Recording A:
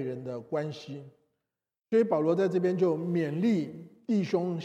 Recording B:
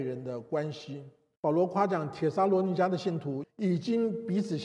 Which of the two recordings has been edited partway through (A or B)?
B